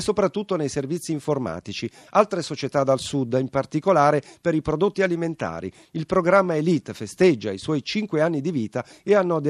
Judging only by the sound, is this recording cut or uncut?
uncut